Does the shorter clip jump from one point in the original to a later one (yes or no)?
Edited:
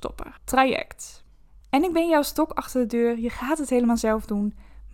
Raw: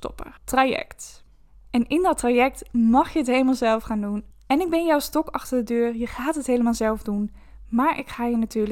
yes